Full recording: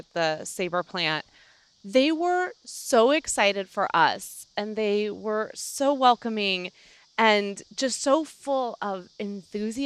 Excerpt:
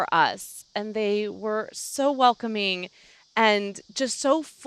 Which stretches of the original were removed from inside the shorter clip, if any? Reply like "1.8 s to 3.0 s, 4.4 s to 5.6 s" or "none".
none